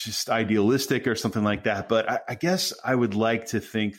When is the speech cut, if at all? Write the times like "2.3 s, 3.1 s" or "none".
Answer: none